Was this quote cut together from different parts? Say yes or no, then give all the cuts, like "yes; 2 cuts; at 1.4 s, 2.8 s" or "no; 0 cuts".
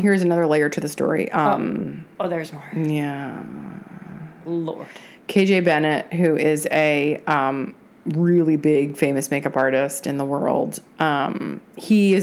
no; 0 cuts